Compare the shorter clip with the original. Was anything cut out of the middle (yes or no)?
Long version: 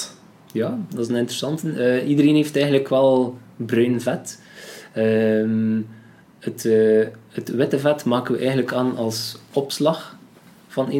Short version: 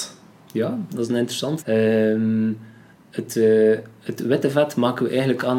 yes